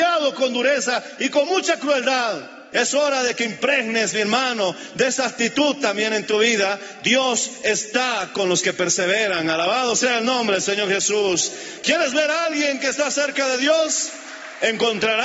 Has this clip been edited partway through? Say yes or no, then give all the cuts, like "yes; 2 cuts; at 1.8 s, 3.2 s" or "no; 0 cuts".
yes; 1 cut; at 2.7 s